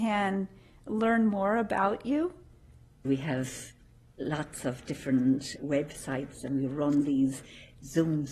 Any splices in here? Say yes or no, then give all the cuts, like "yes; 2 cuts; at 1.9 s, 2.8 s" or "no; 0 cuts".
yes; 2 cuts; at 3.0 s, 5.6 s